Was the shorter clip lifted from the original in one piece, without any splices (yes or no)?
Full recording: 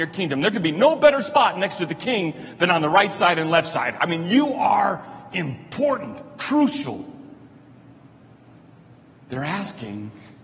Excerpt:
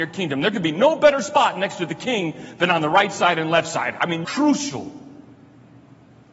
no